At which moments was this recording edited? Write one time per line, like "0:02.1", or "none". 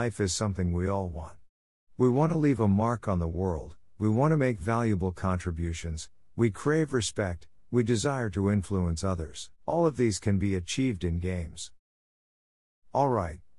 0:07.6
0:09.5